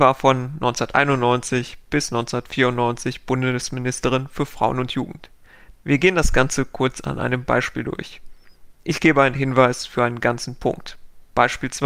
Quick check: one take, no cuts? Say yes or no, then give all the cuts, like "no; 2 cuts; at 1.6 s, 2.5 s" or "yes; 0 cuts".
no; 1 cut; at 5.7 s